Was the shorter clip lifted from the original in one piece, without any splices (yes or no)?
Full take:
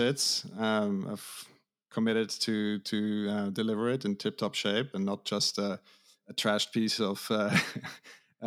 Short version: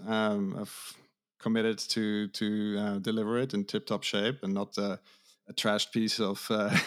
no